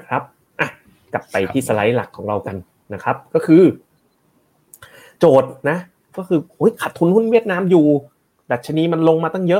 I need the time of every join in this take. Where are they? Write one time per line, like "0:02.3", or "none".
none